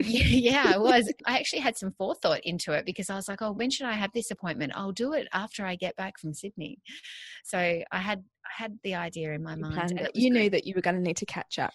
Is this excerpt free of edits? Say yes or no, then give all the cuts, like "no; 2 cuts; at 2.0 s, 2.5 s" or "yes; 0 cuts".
yes; 0 cuts